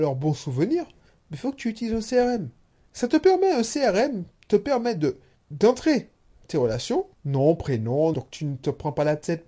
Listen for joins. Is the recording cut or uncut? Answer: cut